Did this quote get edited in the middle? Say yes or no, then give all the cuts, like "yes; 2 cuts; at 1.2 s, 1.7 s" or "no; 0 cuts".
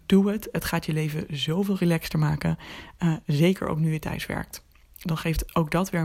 no; 0 cuts